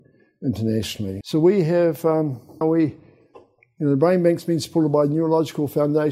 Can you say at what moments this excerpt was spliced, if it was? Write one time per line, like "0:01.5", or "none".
0:01.2
0:02.6